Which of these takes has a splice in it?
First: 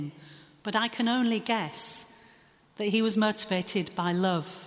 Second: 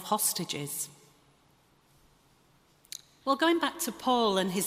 second; 1 cut; at 3.2 s

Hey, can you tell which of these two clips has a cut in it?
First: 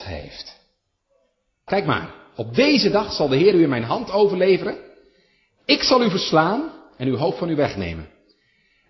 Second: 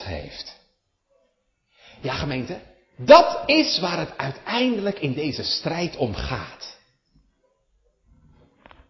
first; 1 cut; at 1.7 s

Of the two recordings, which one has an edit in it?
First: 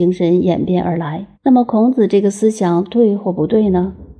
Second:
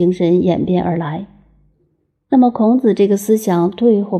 first; 1 cut; at 1.3 s

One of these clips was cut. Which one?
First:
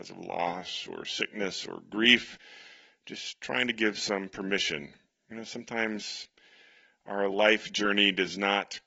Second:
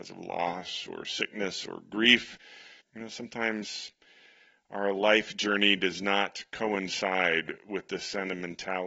second; 1 cut; at 2.8 s

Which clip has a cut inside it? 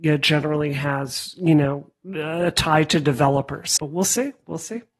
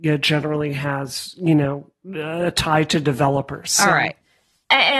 first; 1 cut; at 3.8 s

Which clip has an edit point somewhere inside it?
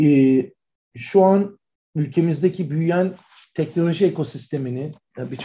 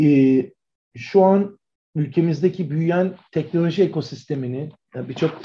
second; 1 cut; at 3.3 s

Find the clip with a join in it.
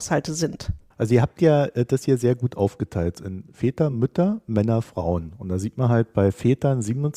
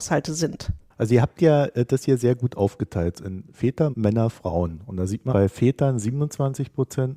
second; 2 cuts; at 3.9 s, 5.3 s

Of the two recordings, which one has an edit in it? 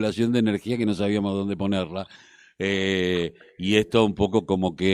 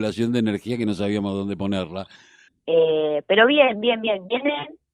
second; 1 cut; at 2.5 s

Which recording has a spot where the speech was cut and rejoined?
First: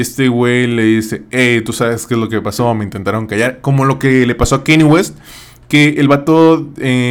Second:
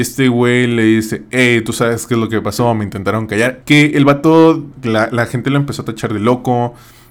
second; 2 cuts; at 3.6 s, 4.7 s

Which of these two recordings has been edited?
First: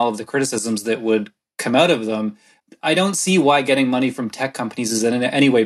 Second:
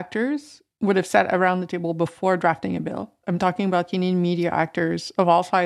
second; 1 cut; at 3.2 s

